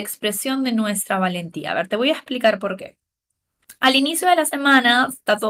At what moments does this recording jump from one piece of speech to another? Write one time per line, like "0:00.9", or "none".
none